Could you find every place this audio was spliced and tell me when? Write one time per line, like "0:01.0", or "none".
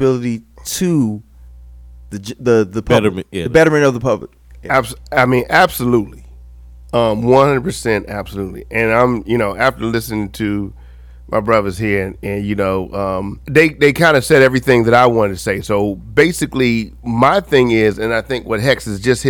0:13.4